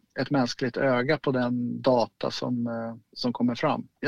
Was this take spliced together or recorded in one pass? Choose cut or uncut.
uncut